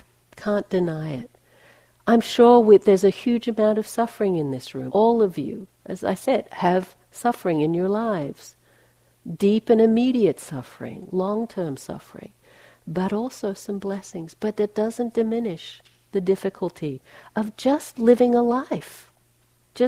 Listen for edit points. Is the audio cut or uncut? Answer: cut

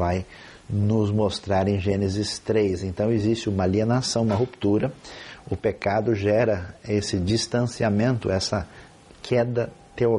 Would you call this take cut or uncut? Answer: uncut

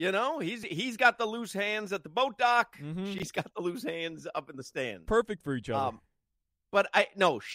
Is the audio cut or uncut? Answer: uncut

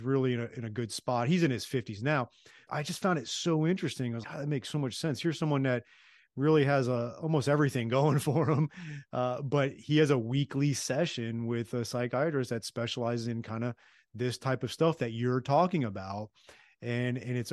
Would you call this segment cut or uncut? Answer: cut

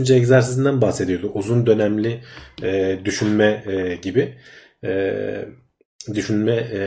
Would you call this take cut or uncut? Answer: uncut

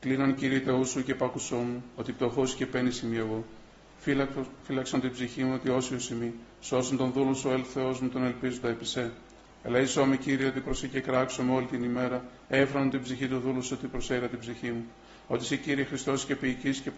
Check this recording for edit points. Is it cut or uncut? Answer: uncut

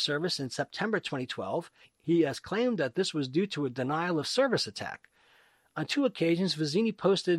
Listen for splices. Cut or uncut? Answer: uncut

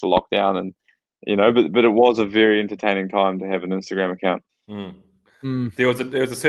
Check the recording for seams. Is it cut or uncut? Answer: cut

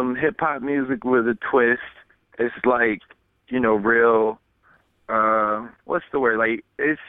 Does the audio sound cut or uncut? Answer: cut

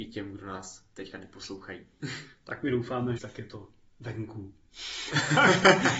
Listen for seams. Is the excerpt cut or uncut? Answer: cut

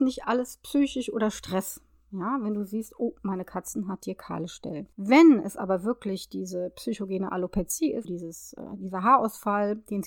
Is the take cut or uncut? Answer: cut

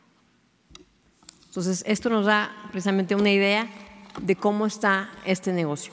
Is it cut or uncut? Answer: uncut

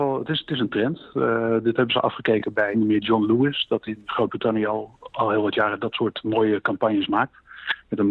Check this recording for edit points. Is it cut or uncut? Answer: cut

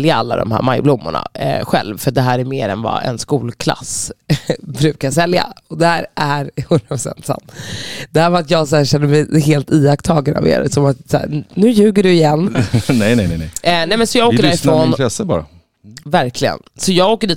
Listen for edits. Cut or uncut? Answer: cut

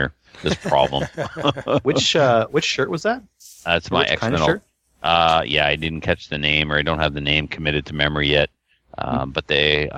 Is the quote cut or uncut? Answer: uncut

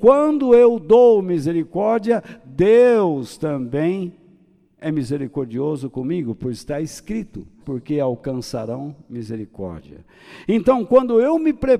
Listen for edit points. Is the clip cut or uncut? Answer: cut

